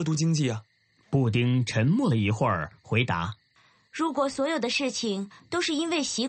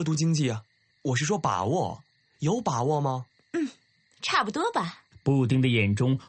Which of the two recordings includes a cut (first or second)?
second